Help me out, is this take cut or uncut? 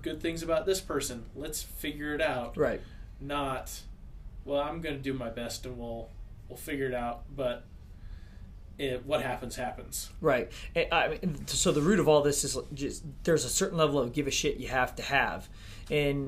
uncut